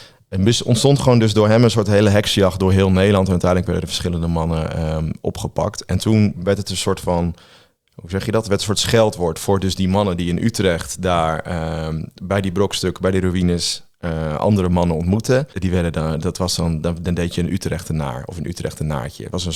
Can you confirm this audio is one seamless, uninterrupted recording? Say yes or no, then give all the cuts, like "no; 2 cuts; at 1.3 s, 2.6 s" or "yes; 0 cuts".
no; 1 cut; at 15.5 s